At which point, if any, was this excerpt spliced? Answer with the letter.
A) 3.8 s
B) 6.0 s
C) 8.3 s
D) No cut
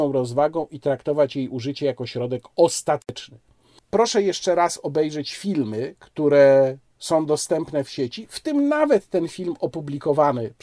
A